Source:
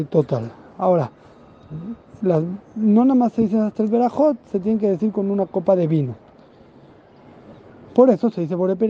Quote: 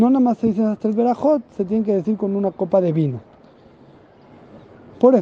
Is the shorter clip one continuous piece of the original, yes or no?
yes